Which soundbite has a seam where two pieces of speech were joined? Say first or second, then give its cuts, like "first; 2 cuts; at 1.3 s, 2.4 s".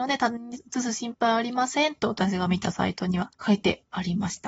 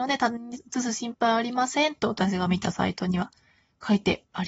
first; 1 cut; at 3.3 s